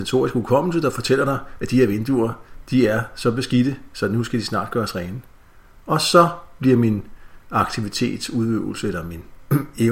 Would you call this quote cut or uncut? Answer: uncut